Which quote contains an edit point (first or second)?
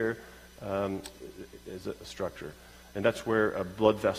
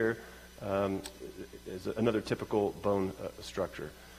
first